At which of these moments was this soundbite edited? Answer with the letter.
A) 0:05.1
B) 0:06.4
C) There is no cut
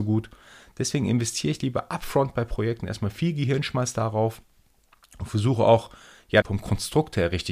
B